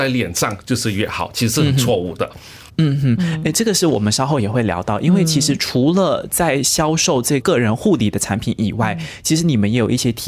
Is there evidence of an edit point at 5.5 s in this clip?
no; 2 cuts; at 2.7 s, 7.4 s

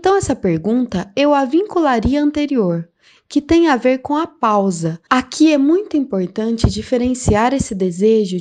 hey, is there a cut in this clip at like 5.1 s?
yes; 2 cuts; at 3.2 s, 5.1 s

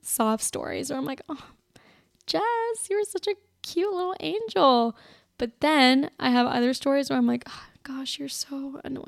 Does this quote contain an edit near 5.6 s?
no; 0 cuts

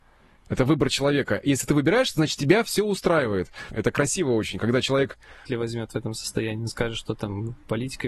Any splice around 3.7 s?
yes; 2 cuts; at 3.7 s, 5.5 s

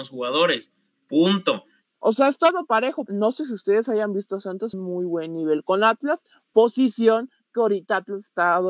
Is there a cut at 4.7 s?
yes; 3 cuts; at 1.8 s, 3.1 s, 4.7 s

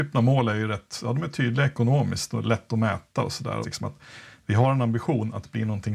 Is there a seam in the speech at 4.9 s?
no; 1 cut; at 3.6 s

